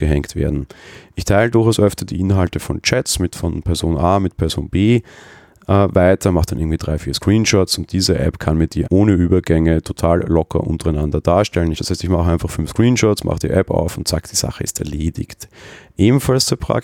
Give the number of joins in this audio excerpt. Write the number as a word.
two